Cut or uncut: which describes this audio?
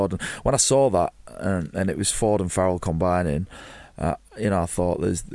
uncut